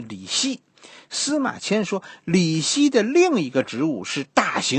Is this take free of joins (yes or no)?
yes